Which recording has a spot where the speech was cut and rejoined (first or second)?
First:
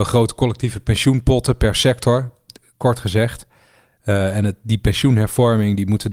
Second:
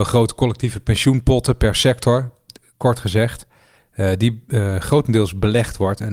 second